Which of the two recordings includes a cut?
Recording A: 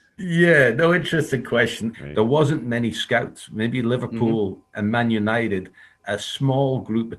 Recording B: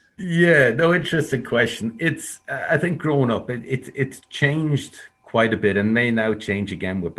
A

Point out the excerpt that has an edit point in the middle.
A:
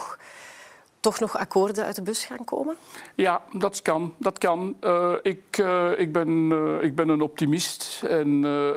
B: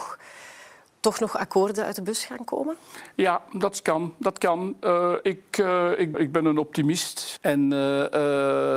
B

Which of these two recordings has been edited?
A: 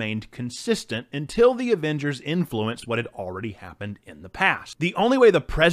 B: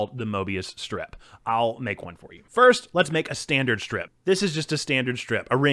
B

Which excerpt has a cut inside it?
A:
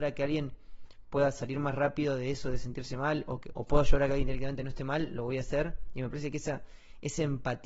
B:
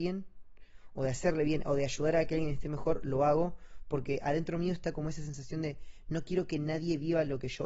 A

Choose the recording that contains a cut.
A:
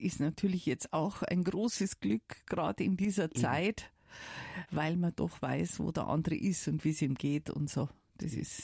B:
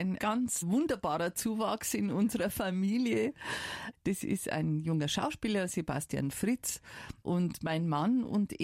B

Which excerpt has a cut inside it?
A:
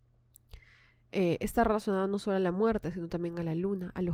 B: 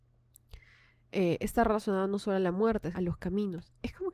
B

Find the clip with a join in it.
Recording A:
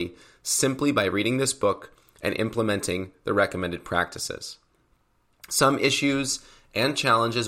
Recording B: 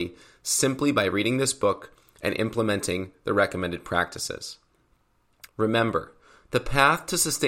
B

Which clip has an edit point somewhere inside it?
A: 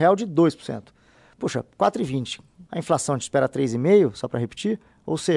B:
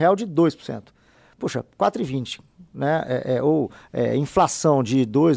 A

